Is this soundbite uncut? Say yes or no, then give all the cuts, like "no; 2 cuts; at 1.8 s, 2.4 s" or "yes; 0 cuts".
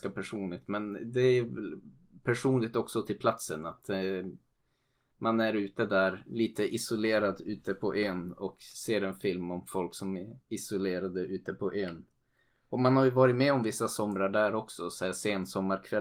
yes; 0 cuts